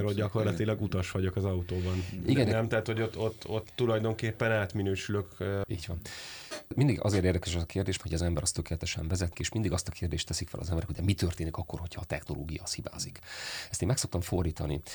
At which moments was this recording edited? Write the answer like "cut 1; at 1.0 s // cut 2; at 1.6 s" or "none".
cut 1; at 5.7 s // cut 2; at 8.0 s // cut 3; at 9.3 s